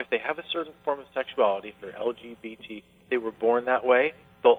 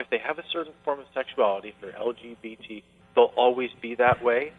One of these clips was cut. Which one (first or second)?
second